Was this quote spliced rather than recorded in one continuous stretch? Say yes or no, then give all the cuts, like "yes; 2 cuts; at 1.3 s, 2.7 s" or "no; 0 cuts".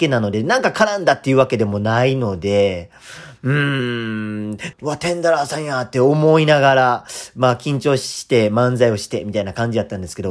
yes; 1 cut; at 4.7 s